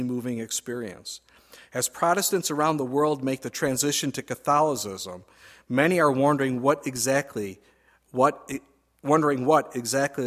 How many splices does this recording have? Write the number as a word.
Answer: zero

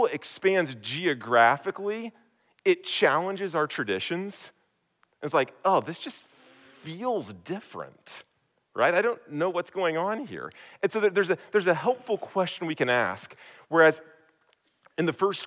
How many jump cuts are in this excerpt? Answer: zero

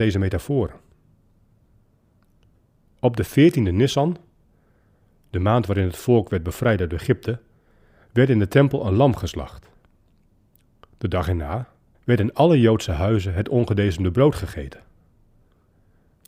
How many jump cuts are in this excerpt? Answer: one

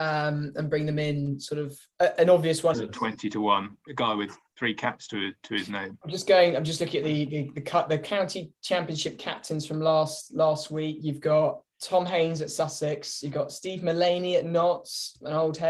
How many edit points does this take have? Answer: two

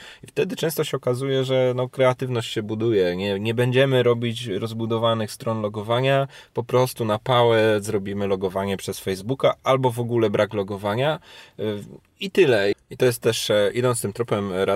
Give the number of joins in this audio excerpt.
one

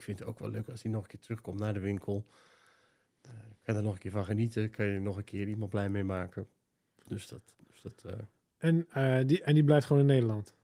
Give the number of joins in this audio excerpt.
one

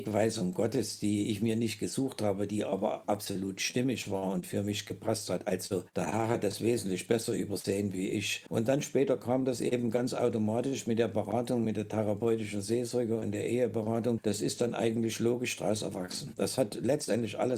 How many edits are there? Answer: zero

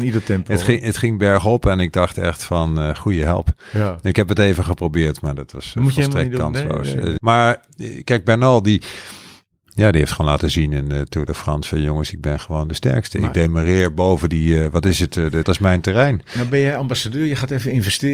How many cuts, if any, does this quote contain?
two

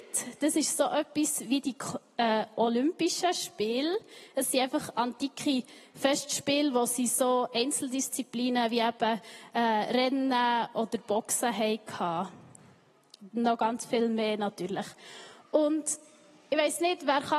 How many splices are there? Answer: zero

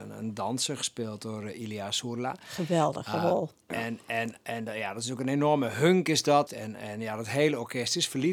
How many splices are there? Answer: one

